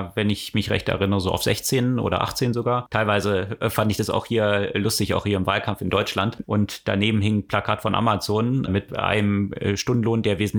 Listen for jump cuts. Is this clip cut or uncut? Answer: cut